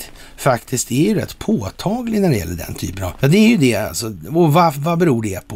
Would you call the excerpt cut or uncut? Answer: cut